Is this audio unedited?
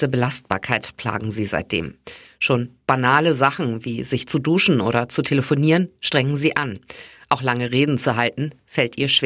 yes; 0 cuts

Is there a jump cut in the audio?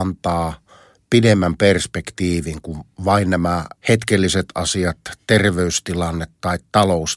yes; 1 cut; at 3.8 s

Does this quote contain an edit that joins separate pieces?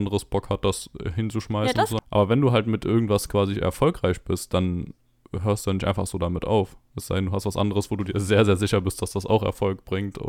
yes; 1 cut; at 2.0 s

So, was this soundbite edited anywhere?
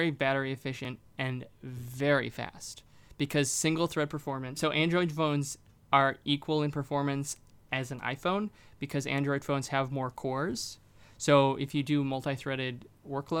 yes; 1 cut; at 4.6 s

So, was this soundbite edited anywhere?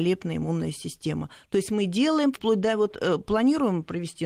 yes; 1 cut; at 2.3 s

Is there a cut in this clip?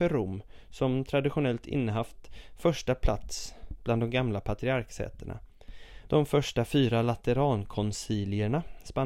yes; 1 cut; at 6.1 s

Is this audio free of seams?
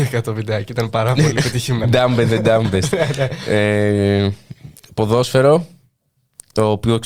yes; 0 cuts

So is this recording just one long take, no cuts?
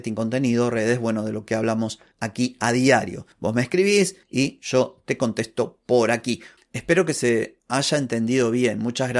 no; 1 cut; at 6.6 s

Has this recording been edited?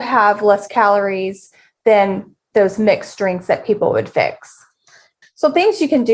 yes; 1 cut; at 5.2 s

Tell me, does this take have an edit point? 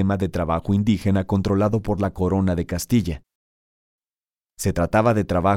no; 0 cuts

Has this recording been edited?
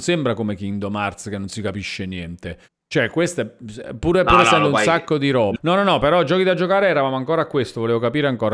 yes; 1 cut; at 5.6 s

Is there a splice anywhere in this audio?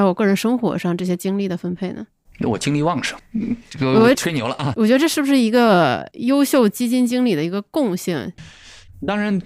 yes; 2 cuts; at 4.1 s, 8.4 s

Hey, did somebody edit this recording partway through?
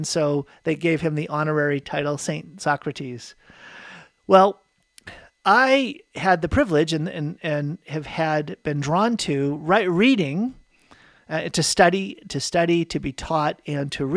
no; 0 cuts

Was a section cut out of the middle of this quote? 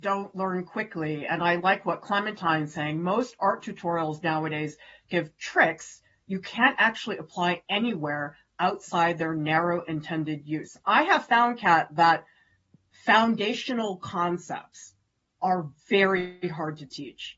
no; 0 cuts

